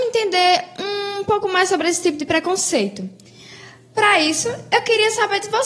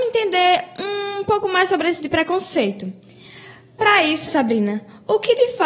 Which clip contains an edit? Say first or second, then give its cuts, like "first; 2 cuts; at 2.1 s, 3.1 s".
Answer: second; 2 cuts; at 2.0 s, 4.3 s